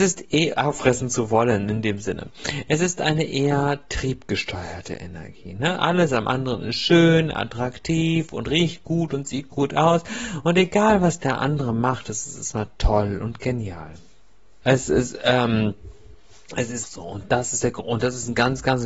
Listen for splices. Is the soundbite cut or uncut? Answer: cut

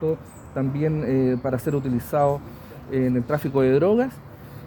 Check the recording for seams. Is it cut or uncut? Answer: uncut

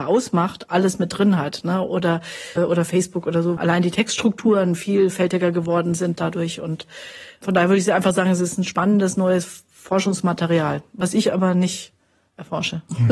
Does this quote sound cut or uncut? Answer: cut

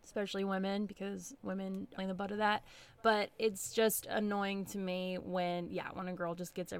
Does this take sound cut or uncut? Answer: cut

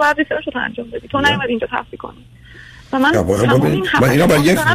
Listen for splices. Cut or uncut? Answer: uncut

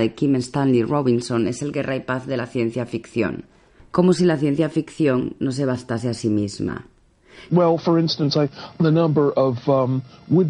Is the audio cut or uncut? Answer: cut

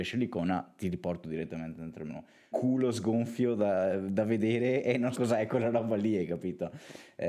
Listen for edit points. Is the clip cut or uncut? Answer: cut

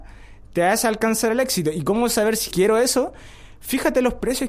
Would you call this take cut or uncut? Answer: cut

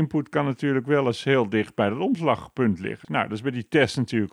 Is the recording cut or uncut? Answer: cut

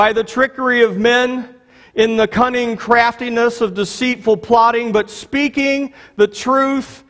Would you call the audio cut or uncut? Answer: uncut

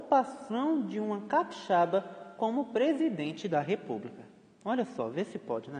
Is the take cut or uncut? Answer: uncut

